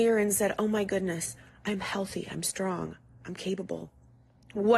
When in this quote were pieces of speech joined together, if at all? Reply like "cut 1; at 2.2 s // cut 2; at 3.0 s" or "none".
none

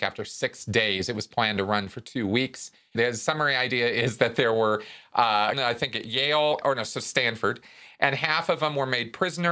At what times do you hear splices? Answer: cut 1; at 2.9 s // cut 2; at 5.5 s // cut 3; at 6.6 s

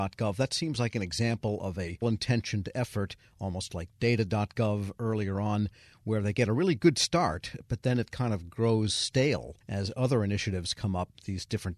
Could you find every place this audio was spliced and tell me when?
cut 1; at 2.0 s

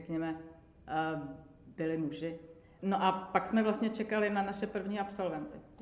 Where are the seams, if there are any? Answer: cut 1; at 2.8 s

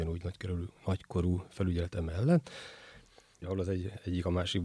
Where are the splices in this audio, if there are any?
cut 1; at 3.4 s

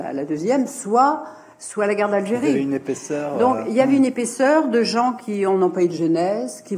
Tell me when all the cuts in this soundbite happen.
none

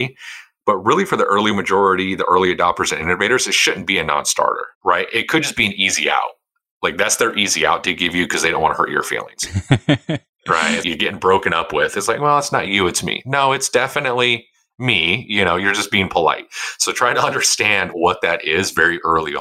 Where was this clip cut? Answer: cut 1; at 4.7 s // cut 2; at 10.8 s // cut 3; at 17.9 s

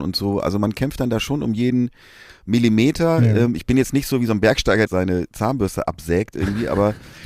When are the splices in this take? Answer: cut 1; at 4.9 s

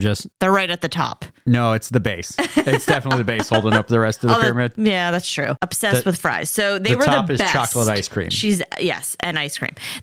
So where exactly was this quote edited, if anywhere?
none

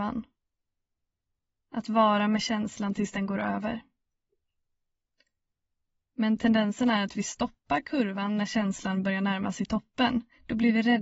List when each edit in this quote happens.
none

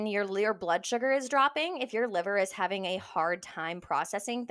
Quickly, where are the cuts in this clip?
none

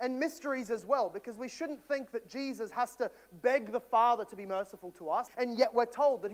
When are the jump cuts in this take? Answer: cut 1; at 5.3 s

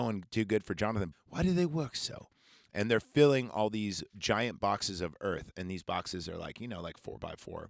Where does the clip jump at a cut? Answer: cut 1; at 1.1 s

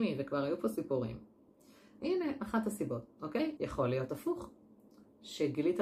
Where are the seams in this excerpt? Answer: cut 1; at 2.0 s // cut 2; at 3.6 s

